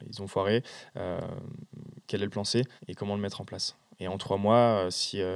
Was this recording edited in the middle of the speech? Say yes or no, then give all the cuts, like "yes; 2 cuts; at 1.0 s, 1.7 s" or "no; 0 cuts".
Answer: yes; 1 cut; at 2.8 s